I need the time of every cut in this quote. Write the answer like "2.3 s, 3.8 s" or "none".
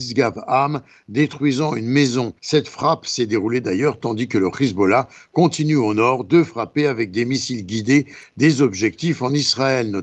2.4 s